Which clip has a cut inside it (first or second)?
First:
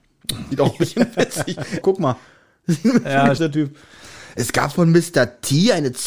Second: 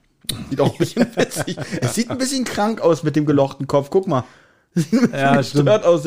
first